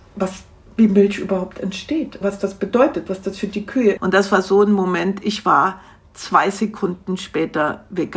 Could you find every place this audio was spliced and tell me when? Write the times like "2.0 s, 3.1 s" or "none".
2.2 s, 4.0 s